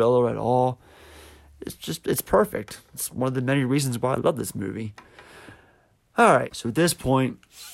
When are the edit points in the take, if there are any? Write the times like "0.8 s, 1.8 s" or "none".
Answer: none